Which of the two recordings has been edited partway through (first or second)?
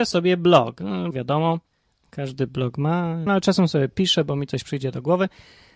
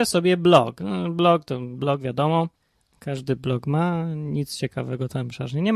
first